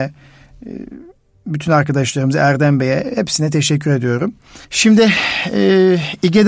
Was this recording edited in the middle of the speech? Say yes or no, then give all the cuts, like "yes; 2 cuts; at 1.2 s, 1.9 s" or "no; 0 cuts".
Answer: yes; 1 cut; at 4.6 s